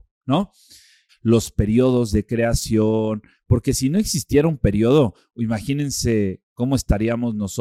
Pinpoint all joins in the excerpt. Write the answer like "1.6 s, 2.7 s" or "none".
1.1 s, 3.3 s